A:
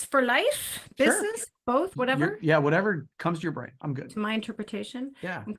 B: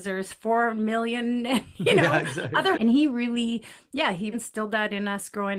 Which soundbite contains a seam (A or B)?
B